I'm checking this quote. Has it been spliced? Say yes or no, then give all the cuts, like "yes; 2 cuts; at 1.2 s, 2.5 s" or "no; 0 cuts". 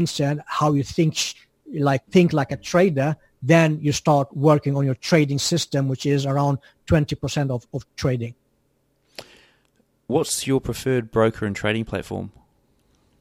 yes; 2 cuts; at 2.1 s, 7.9 s